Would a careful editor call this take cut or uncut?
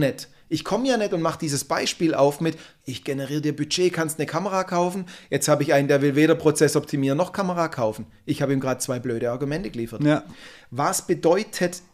uncut